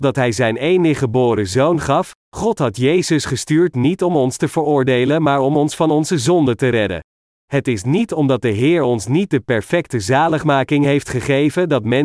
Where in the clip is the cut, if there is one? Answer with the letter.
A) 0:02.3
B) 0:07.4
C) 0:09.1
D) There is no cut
B